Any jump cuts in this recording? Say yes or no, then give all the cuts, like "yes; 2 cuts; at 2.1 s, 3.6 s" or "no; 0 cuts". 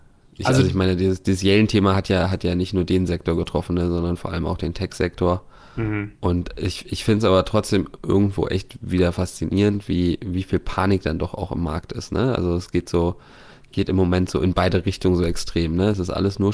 no; 0 cuts